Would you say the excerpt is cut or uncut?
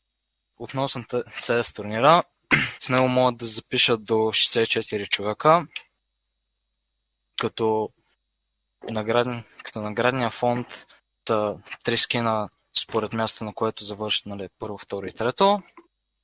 cut